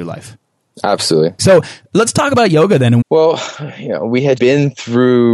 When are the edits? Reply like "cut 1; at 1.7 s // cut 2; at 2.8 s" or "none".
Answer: cut 1; at 1.4 s // cut 2; at 3.0 s // cut 3; at 4.4 s